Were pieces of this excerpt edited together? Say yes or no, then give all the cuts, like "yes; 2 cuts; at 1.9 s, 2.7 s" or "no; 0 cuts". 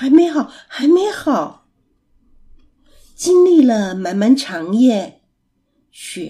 no; 0 cuts